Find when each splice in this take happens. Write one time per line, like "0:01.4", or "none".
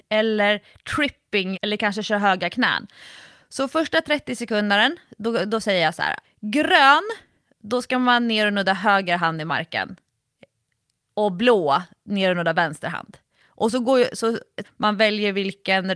0:01.5
0:06.2
0:14.6